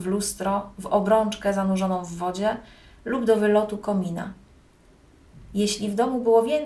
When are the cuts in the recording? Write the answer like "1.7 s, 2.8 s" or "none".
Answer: none